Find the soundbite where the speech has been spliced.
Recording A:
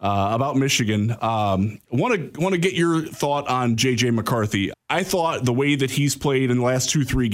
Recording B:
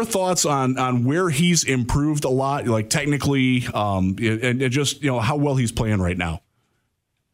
A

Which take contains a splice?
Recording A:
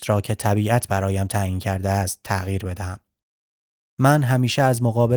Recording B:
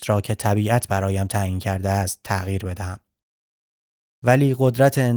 A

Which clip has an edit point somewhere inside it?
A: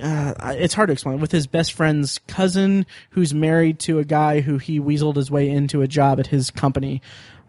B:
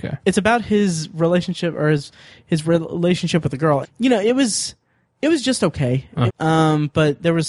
B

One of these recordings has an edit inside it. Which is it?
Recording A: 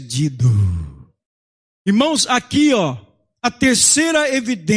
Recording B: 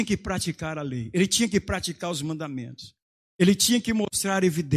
B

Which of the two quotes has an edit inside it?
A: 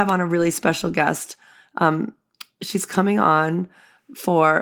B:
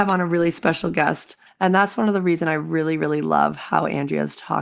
B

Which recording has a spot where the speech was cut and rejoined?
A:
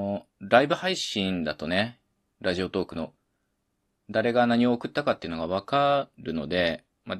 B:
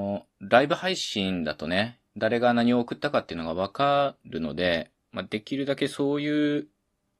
B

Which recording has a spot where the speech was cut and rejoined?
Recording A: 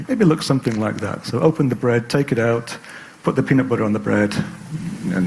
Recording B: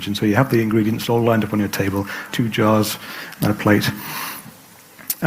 B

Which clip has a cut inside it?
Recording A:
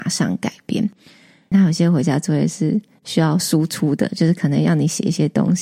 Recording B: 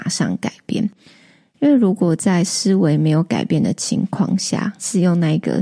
A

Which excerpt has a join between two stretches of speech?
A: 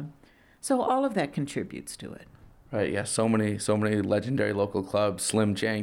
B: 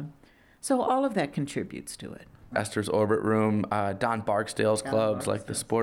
B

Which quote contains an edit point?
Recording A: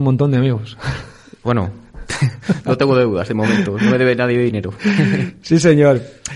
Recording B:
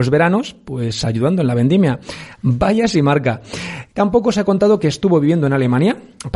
B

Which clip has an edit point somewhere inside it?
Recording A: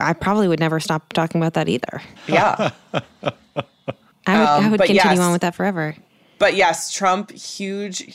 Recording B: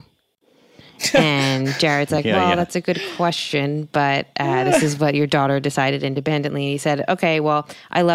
A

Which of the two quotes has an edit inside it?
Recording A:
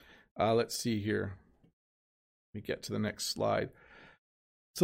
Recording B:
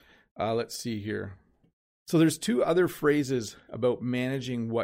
B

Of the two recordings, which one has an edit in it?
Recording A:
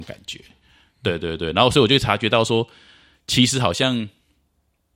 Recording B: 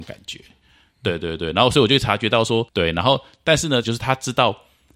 B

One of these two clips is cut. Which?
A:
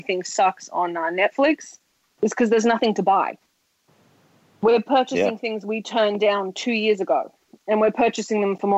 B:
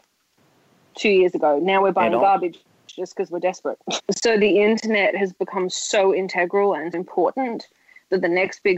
B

